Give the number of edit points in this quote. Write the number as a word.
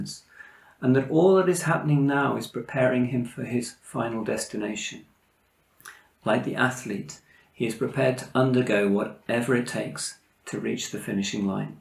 zero